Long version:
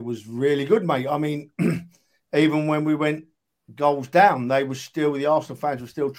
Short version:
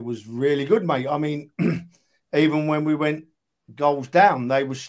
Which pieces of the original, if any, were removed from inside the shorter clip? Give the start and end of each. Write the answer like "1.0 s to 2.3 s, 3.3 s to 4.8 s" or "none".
none

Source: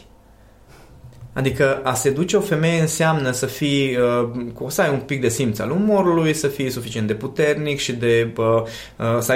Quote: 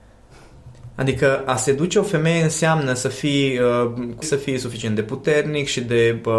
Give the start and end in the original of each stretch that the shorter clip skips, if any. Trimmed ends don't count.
4.6 s to 6.3 s

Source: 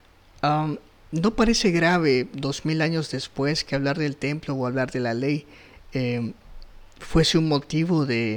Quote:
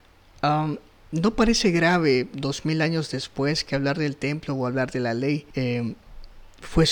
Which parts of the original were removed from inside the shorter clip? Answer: 5.5 s to 5.9 s

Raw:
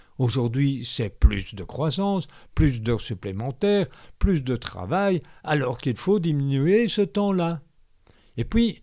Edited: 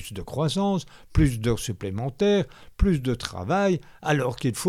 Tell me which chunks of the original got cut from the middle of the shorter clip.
none

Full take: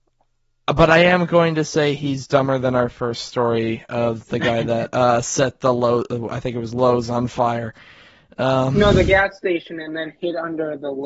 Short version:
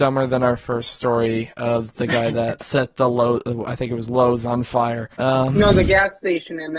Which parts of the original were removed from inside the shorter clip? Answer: 4.9 s to 5.2 s, 7.8 s to 8.3 s

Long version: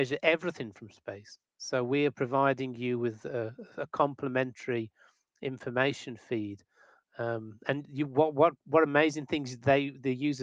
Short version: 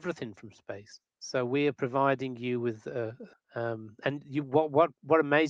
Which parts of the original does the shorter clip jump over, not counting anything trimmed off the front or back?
3.7 s to 7.0 s

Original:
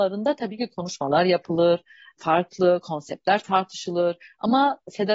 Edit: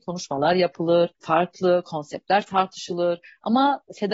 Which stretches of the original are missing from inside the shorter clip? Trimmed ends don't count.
1.8 s to 2.1 s

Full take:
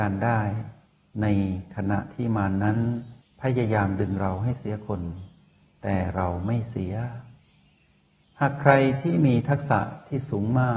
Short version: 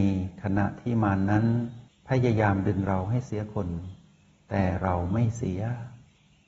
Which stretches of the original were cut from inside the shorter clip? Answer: none

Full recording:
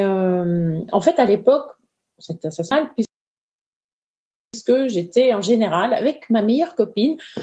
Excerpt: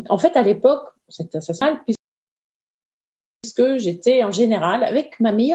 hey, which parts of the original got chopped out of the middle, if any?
1.8 s to 2.1 s

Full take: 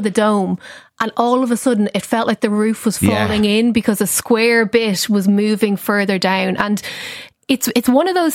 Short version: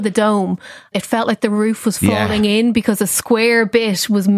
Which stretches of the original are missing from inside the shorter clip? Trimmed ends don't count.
0.9 s to 1.9 s

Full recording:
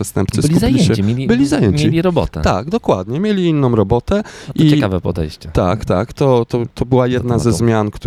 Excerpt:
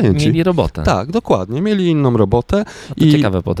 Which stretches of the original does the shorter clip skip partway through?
none

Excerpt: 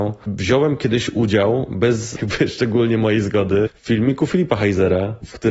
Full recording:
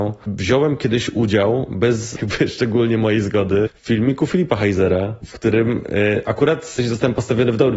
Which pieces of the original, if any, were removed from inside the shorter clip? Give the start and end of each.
none

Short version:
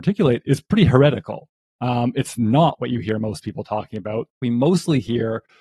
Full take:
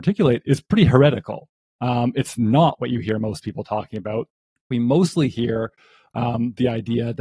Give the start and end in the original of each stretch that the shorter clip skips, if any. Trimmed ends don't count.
4.3 s to 4.6 s

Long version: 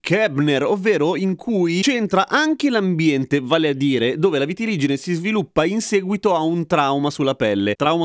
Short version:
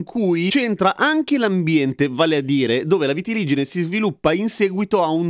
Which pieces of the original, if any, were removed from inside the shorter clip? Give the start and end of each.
none

